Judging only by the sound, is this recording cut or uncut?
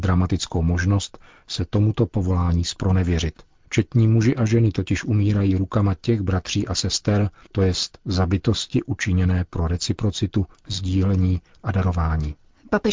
cut